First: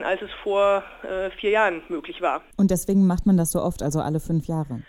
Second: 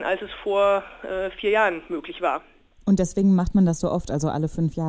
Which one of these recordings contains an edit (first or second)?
first